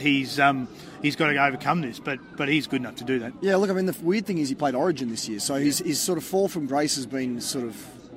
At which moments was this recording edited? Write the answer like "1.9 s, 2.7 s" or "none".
none